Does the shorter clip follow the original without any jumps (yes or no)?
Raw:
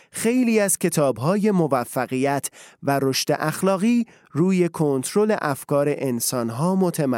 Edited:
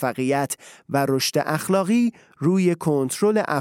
yes